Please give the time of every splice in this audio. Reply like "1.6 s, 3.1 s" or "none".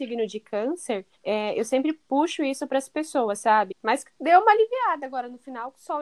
1.1 s, 3.7 s